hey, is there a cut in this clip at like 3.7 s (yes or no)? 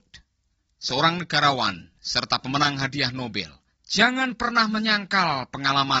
yes